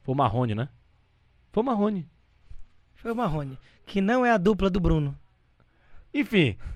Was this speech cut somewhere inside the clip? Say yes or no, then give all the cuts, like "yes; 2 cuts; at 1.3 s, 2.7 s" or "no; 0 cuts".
no; 0 cuts